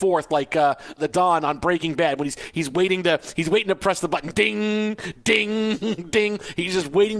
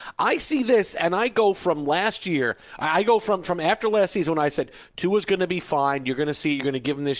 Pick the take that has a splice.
first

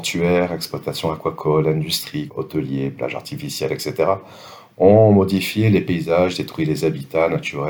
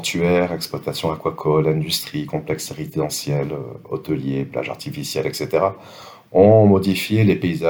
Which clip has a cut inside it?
first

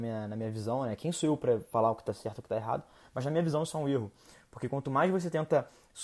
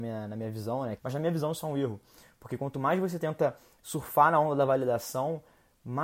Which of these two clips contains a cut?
second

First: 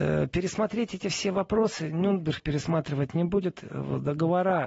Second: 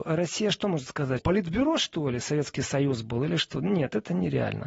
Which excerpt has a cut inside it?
second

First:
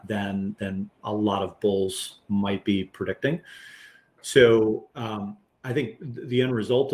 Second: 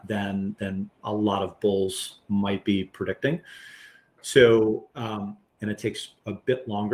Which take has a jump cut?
second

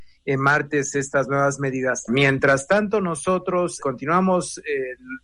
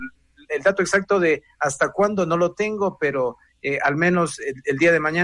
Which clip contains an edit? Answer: first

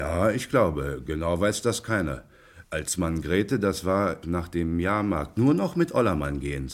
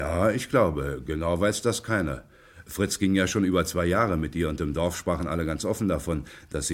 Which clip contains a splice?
first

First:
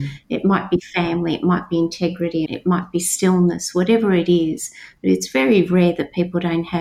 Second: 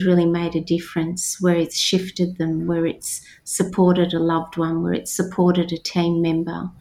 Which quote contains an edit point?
first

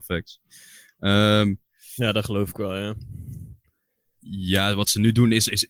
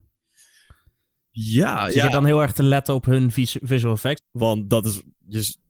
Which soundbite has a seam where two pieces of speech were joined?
second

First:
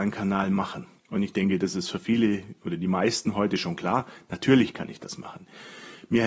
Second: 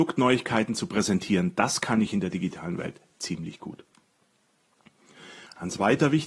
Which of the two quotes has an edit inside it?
first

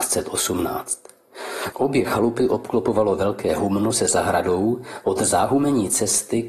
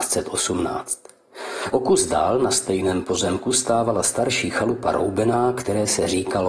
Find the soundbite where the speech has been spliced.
first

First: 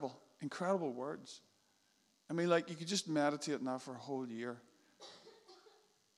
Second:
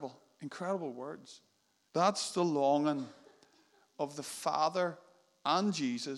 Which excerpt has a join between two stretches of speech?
second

